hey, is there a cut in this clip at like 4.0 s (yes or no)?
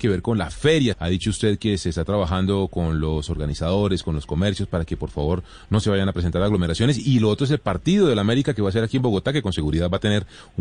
no